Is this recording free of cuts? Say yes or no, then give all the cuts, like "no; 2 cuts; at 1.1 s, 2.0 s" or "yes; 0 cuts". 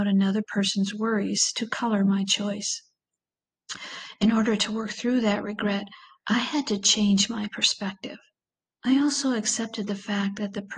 no; 1 cut; at 8.7 s